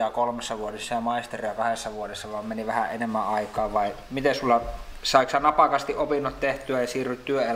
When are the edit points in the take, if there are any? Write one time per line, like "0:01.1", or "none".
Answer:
none